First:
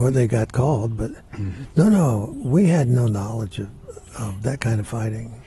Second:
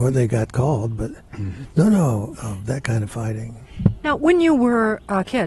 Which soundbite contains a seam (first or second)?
second